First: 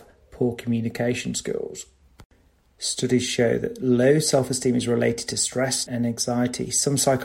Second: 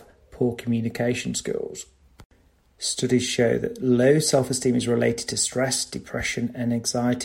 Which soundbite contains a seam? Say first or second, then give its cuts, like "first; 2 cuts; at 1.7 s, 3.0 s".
first; 1 cut; at 5.9 s